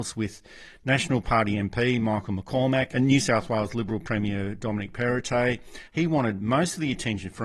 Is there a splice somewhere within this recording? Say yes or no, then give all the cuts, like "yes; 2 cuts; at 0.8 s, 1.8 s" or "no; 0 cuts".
yes; 1 cut; at 5.9 s